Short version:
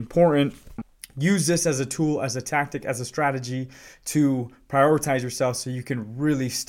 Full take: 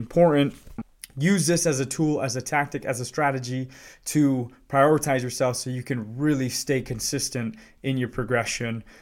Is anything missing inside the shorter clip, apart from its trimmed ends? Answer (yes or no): no